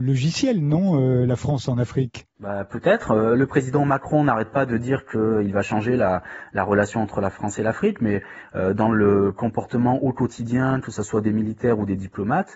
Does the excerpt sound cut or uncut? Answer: uncut